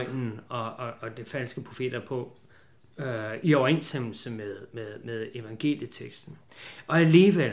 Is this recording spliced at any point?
no; 0 cuts

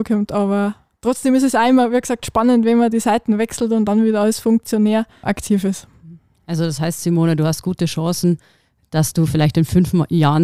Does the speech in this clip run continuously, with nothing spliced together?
no; 1 cut; at 5.2 s

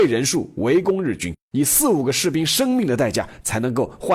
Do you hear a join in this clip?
no; 0 cuts

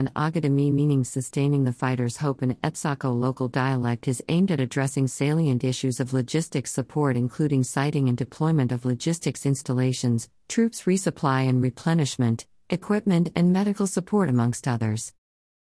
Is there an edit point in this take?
yes; 1 cut; at 10.4 s

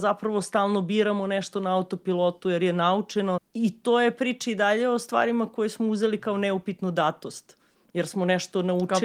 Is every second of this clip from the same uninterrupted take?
no; 1 cut; at 3.4 s

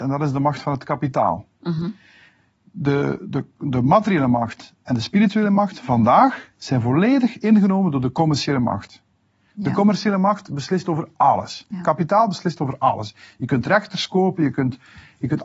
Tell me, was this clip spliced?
no; 0 cuts

